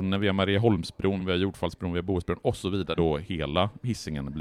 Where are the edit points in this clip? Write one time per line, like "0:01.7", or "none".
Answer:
0:01.2
0:03.0